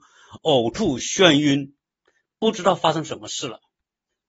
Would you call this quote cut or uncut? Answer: uncut